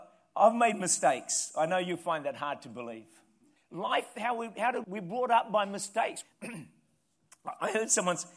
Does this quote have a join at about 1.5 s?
no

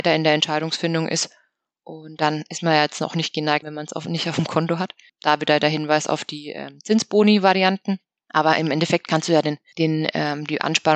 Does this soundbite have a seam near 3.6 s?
yes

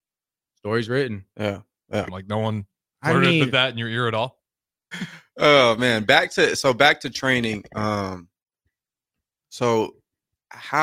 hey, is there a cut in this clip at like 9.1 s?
no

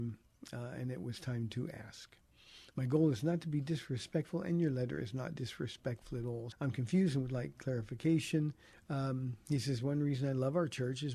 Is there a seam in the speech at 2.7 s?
no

